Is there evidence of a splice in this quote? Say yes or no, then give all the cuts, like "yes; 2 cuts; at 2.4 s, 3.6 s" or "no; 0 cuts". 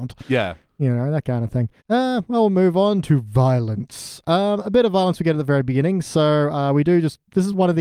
yes; 1 cut; at 1.8 s